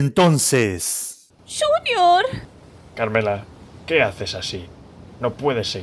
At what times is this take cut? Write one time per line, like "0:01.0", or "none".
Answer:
0:01.4